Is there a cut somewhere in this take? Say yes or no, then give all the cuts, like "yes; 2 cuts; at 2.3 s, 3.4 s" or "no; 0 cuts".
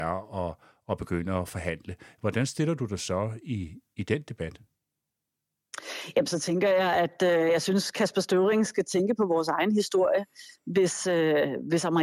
no; 0 cuts